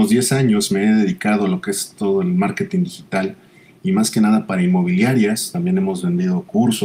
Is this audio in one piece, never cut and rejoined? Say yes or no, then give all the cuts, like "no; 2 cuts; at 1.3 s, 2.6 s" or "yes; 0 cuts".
yes; 0 cuts